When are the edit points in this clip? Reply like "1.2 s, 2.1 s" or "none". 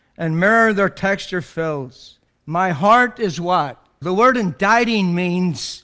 2.3 s, 4.0 s